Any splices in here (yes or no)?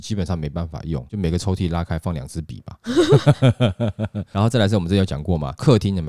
no